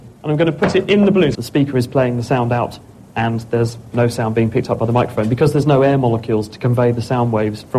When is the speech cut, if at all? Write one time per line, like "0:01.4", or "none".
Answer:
0:01.3